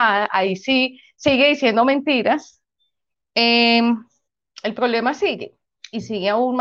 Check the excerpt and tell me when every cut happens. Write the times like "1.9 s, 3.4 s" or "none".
3.2 s